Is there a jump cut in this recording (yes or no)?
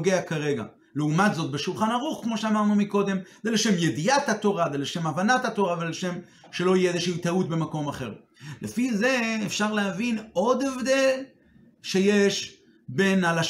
no